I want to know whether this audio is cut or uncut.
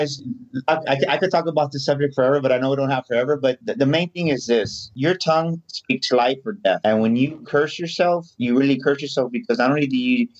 uncut